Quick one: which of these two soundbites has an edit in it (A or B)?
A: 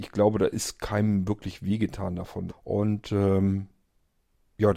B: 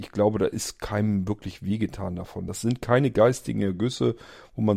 A